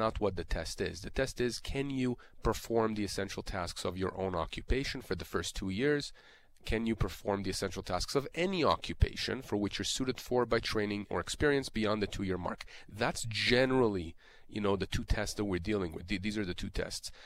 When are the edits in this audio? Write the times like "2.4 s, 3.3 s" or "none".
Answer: 11.1 s